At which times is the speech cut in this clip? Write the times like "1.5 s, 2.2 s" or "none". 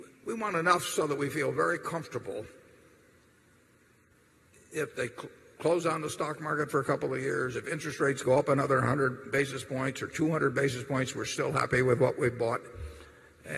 none